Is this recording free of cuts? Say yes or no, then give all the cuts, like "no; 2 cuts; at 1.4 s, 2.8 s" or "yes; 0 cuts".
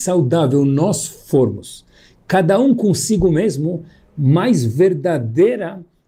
yes; 0 cuts